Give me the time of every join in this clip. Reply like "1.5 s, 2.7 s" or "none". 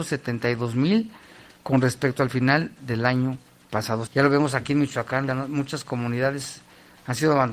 4.1 s, 5.3 s